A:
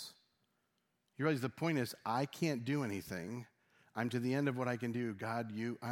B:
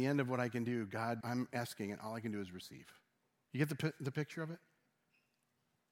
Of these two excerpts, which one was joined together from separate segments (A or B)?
B